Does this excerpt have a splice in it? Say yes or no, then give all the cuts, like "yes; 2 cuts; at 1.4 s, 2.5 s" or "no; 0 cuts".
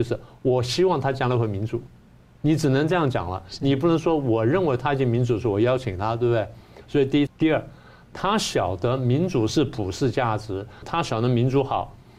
yes; 2 cuts; at 7.3 s, 10.8 s